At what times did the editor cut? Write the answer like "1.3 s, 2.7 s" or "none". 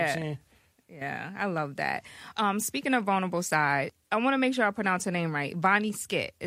2.3 s